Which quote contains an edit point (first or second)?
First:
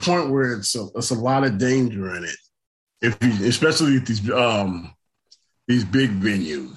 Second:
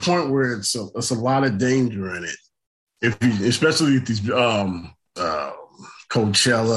second